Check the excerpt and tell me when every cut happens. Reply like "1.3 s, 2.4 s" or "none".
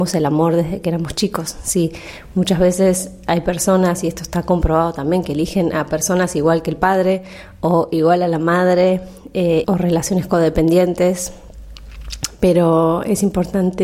9.6 s